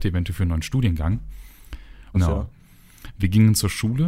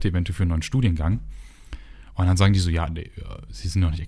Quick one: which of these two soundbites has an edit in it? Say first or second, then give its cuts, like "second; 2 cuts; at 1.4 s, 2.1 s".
first; 1 cut; at 2.1 s